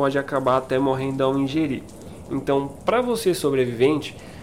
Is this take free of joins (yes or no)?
yes